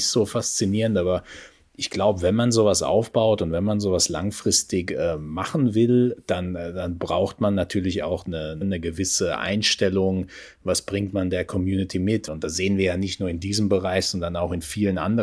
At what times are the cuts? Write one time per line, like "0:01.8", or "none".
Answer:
0:08.6
0:12.3